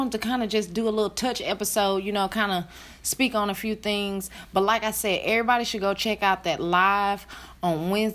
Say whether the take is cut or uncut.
uncut